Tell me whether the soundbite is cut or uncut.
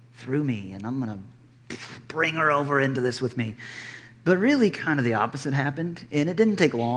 uncut